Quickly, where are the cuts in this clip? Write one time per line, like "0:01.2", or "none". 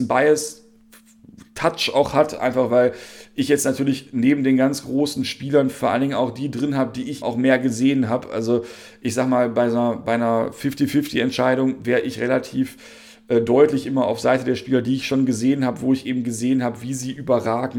0:07.2